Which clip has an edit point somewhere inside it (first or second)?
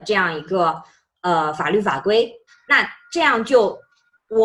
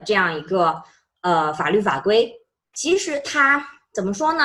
first